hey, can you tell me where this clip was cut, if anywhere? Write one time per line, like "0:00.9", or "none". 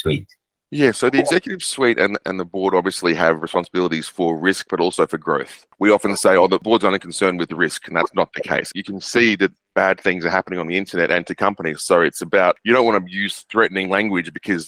0:08.7